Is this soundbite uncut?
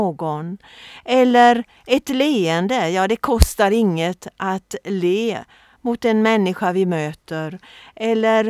yes; 0 cuts

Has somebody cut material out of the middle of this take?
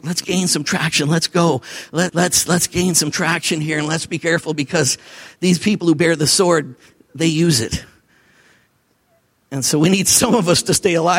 yes; 1 cut; at 2.1 s

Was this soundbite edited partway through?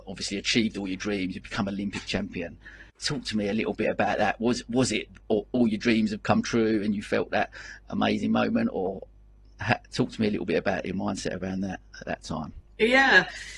yes; 1 cut; at 2.9 s

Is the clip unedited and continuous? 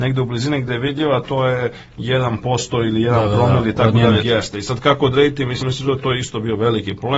no; 2 cuts; at 4.2 s, 5.6 s

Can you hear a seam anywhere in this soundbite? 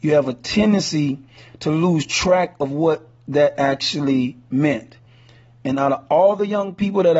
no; 0 cuts

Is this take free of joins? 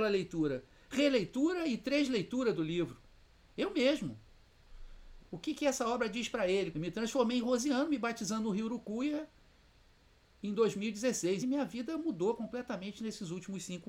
no; 3 cuts; at 5.2 s, 6.7 s, 11.4 s

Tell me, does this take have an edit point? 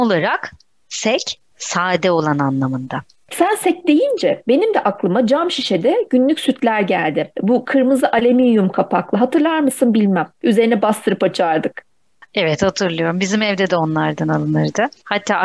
yes; 1 cut; at 1.5 s

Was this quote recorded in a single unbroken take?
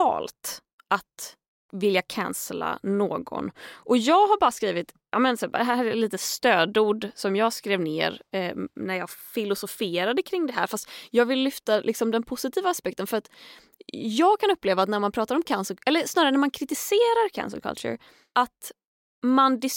yes; 0 cuts

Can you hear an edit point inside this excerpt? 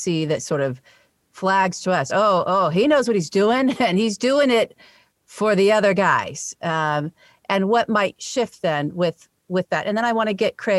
no; 0 cuts

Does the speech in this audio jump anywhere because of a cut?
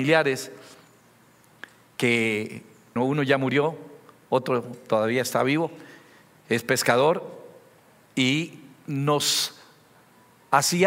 yes; 1 cut; at 3.0 s

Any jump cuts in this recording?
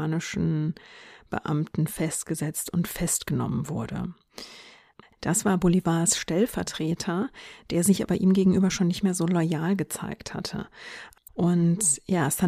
yes; 2 cuts; at 5.0 s, 11.3 s

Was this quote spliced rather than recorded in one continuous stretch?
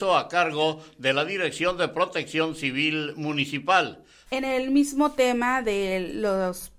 yes; 1 cut; at 4.3 s

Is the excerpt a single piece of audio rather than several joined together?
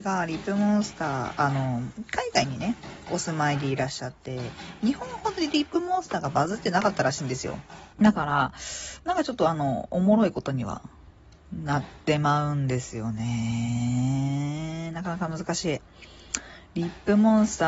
no; 1 cut; at 7.9 s

